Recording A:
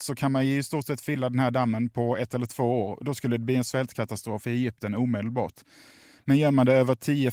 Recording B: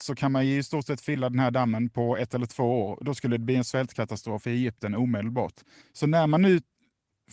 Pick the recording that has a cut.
B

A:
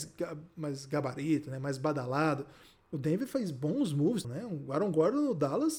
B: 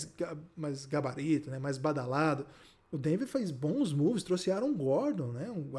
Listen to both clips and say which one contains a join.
A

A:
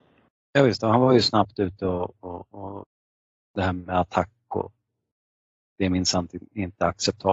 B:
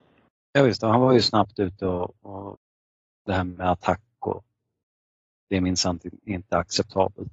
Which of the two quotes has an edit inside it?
B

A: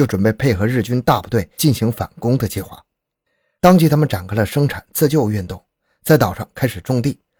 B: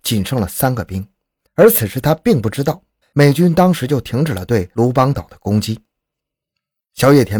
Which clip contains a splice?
B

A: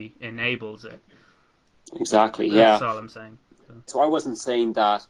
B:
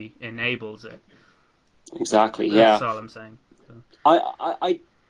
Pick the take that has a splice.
A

